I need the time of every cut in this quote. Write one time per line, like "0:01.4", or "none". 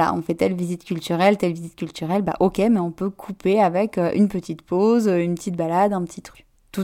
none